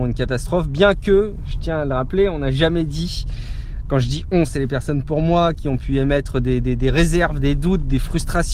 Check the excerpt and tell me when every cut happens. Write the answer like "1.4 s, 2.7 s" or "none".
none

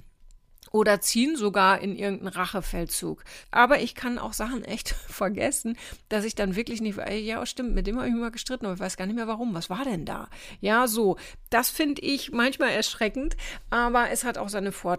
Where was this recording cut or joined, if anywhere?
3.4 s

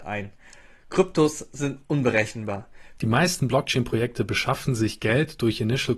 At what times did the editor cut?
3.0 s

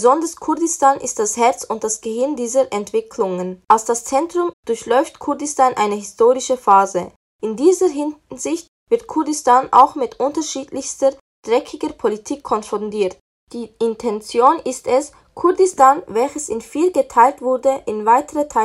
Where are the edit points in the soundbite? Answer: 4.5 s

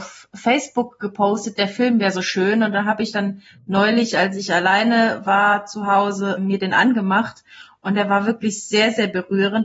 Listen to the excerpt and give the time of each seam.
6.4 s

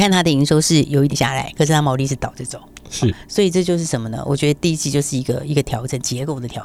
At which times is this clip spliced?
1.1 s

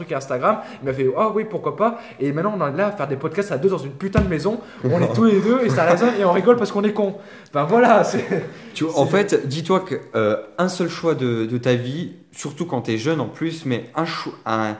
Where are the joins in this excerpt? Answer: none

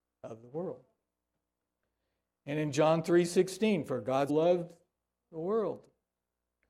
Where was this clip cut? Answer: 4.3 s

